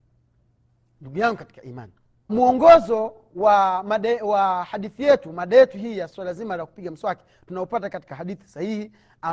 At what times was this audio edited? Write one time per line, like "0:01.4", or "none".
0:02.3
0:06.1